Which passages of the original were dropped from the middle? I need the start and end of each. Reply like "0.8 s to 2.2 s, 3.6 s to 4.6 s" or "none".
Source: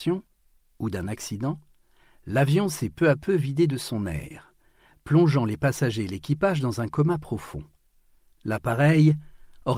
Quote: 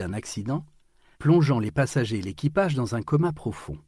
2.1 s to 5.0 s